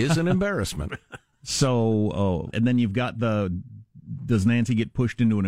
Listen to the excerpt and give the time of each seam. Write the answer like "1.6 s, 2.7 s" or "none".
2.5 s